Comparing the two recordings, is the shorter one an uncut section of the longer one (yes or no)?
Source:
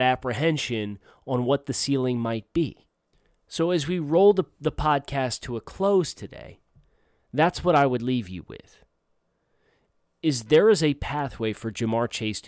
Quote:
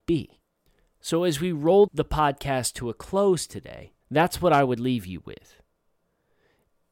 no